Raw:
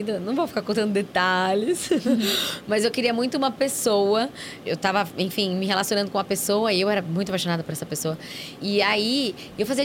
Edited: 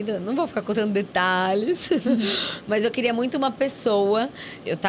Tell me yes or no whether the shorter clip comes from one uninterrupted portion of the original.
yes